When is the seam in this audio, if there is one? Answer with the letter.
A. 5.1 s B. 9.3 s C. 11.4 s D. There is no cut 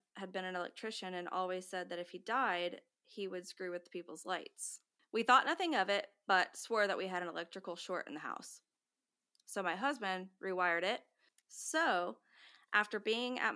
C